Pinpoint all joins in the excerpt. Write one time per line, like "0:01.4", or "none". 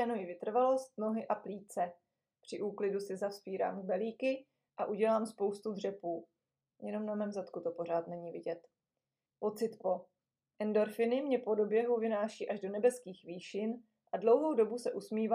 0:09.3